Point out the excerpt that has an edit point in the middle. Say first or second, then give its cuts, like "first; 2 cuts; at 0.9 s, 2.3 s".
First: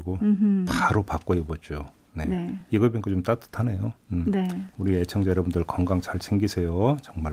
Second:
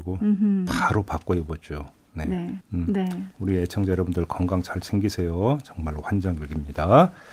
second; 1 cut; at 2.6 s